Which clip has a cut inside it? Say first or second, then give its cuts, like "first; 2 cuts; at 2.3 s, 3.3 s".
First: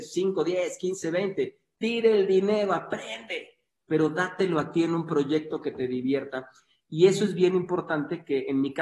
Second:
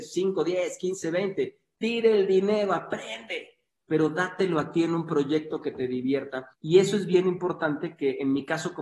second; 1 cut; at 6.5 s